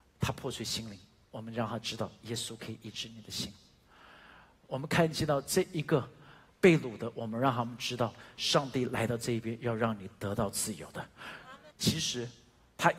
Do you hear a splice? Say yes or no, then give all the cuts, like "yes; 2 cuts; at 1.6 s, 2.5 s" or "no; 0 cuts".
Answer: yes; 1 cut; at 11.7 s